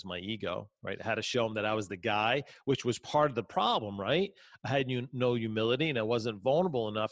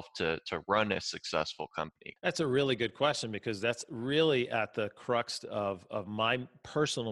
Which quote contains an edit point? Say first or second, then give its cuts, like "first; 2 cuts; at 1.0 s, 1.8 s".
second; 1 cut; at 2.2 s